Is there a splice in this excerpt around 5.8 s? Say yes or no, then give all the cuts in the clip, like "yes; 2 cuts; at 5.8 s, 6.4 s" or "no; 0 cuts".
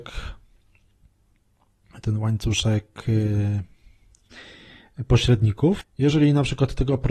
yes; 1 cut; at 5.8 s